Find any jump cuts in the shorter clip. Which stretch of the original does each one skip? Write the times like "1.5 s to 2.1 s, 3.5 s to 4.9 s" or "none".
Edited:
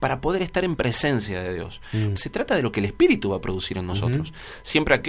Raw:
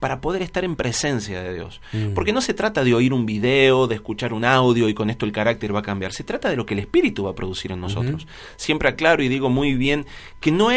2.2 s to 6.1 s